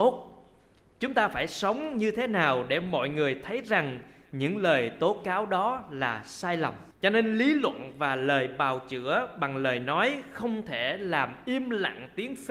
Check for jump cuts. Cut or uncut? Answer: cut